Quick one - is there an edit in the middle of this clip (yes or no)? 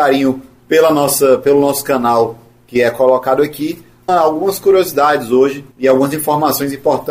yes